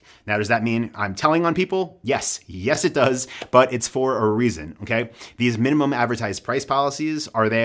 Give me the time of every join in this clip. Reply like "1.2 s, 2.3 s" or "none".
none